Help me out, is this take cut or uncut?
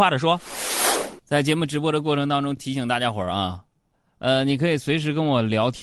uncut